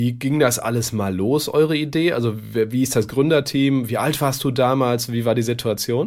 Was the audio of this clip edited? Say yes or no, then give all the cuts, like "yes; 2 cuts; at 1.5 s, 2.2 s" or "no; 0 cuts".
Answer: no; 0 cuts